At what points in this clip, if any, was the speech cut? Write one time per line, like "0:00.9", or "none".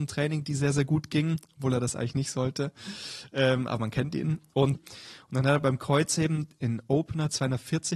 0:04.8